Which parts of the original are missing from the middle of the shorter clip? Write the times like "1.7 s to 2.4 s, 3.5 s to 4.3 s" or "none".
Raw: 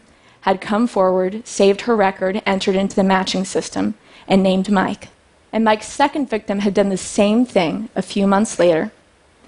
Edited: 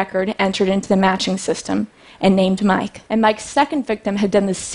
5.1 s to 5.5 s